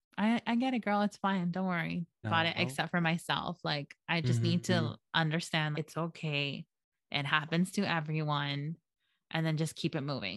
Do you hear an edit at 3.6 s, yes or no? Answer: no